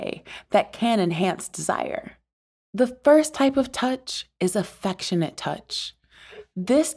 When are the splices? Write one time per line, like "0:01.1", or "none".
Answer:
0:02.6